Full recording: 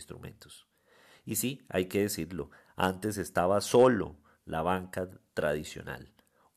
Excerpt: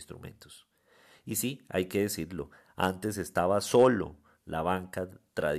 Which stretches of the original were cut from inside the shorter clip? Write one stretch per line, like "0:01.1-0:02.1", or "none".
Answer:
none